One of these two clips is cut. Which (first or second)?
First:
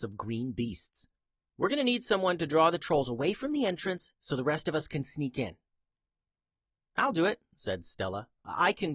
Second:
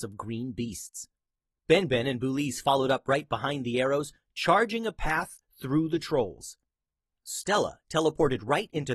first